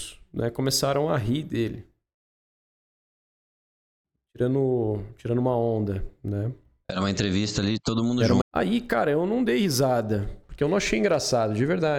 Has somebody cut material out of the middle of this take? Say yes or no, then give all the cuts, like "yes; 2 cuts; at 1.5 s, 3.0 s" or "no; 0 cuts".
yes; 1 cut; at 8.4 s